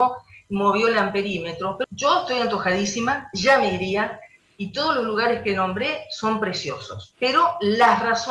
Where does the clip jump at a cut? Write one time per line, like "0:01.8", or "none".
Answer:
0:01.8